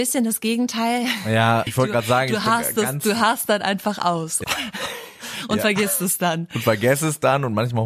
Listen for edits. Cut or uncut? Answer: cut